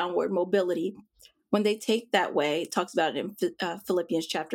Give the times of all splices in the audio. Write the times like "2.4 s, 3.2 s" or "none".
none